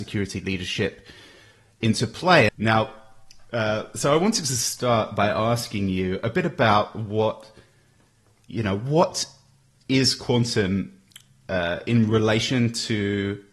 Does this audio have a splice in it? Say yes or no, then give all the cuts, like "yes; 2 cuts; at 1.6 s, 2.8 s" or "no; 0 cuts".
yes; 1 cut; at 2.5 s